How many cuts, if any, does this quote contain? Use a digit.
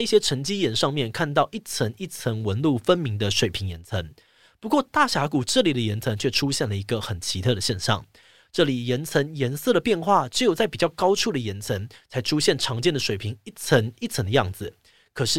0